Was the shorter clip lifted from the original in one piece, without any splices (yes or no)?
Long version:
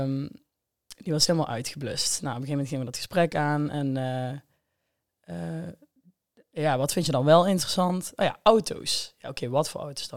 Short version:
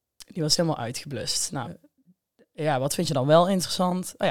no